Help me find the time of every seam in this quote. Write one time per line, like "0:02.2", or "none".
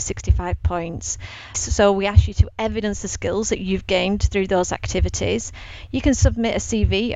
0:01.5